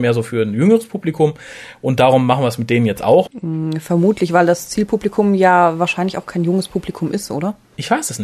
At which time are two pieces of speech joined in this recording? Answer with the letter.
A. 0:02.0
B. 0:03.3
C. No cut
B